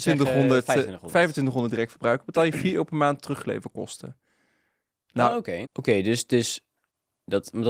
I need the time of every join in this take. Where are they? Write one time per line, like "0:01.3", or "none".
0:05.6